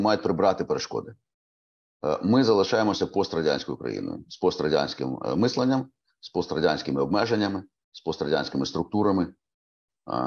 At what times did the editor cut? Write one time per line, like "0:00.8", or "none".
none